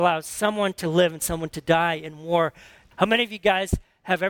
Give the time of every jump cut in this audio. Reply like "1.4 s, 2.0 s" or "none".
2.9 s